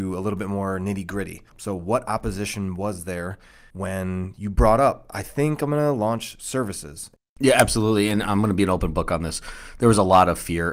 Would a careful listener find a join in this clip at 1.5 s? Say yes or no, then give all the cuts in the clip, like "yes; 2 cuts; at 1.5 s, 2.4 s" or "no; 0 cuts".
yes; 1 cut; at 1.5 s